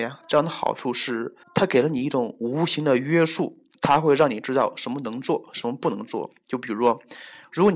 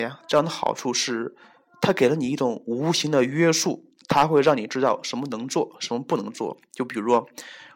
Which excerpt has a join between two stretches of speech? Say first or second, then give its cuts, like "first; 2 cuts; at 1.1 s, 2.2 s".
first; 1 cut; at 1.4 s